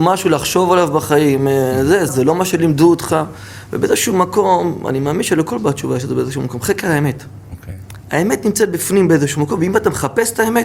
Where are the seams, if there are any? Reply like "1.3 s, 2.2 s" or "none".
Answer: 2.1 s